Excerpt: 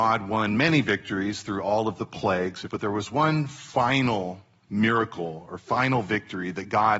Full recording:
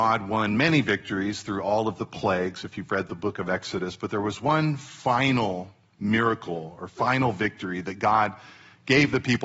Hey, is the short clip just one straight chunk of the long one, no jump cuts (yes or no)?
no